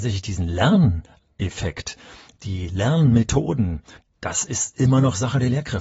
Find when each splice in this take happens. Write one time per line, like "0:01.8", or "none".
none

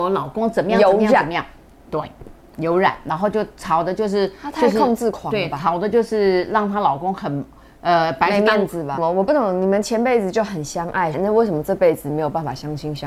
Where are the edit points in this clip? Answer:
0:09.0
0:11.1

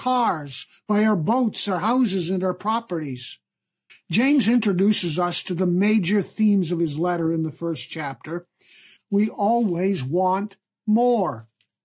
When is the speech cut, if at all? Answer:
0:03.9
0:09.0

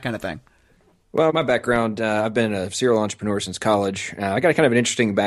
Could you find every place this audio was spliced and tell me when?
none

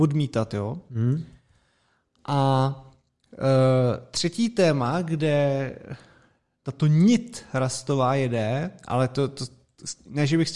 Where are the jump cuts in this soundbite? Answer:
none

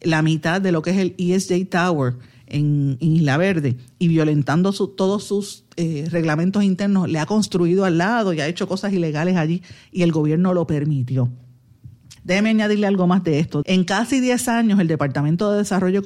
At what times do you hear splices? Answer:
0:12.2
0:13.6

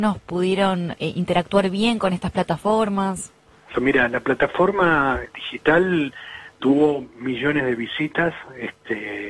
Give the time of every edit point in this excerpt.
0:03.7
0:05.3

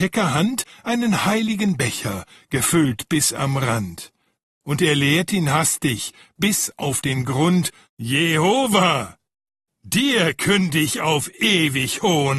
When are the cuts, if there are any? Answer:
0:07.8

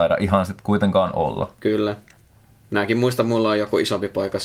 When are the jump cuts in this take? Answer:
none

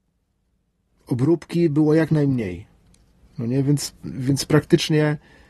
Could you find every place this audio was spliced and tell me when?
none

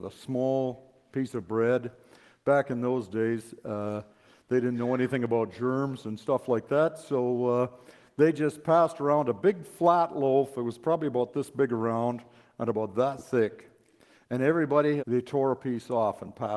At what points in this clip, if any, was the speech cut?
0:15.0

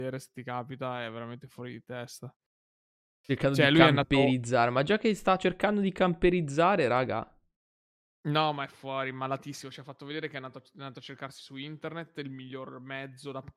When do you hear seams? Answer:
none

